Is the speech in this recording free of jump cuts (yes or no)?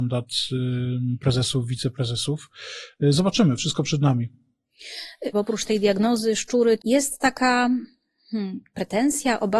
no